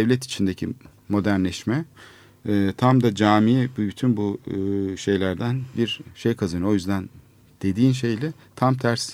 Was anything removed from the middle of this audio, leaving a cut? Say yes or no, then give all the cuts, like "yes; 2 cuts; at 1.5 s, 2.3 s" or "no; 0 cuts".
yes; 1 cut; at 5.7 s